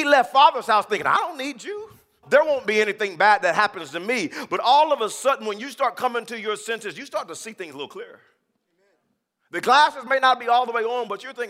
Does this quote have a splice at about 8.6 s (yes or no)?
no